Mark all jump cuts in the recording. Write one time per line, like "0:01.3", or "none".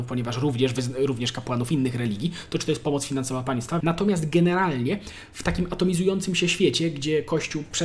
0:03.8